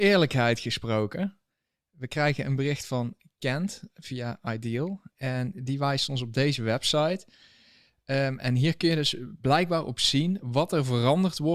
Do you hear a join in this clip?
no; 0 cuts

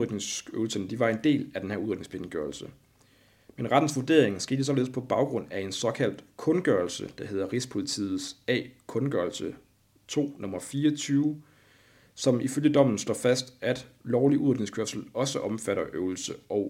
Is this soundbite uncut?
yes; 0 cuts

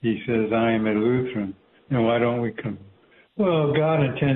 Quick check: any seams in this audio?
yes; 2 cuts; at 1.8 s, 3.3 s

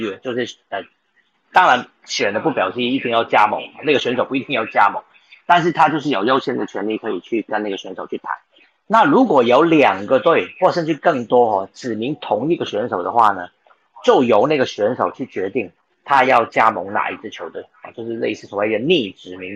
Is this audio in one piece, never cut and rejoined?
yes; 0 cuts

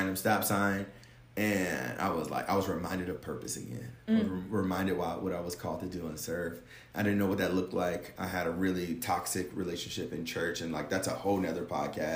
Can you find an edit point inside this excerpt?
no; 0 cuts

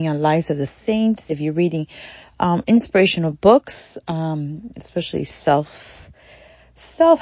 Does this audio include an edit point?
no; 0 cuts

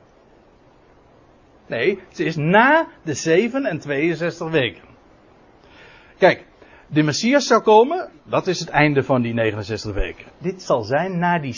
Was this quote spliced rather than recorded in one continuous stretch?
yes; 2 cuts; at 8.2 s, 10.3 s

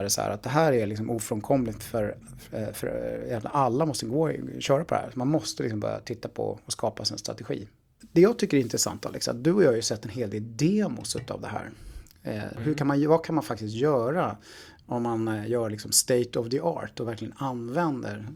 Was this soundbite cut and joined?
no; 0 cuts

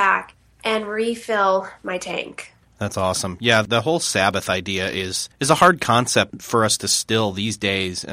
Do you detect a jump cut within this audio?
no; 0 cuts

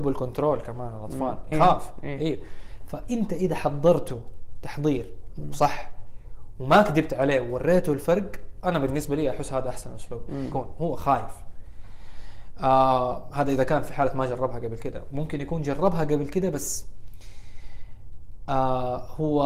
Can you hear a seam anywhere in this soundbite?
yes; 2 cuts; at 1.5 s, 10.5 s

